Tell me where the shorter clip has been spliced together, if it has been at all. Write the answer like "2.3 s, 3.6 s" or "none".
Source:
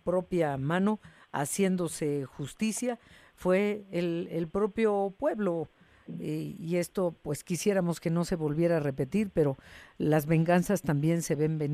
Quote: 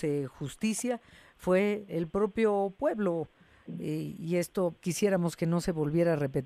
1.9 s, 4.8 s